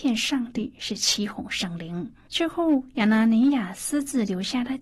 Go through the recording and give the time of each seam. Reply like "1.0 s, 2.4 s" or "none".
2.3 s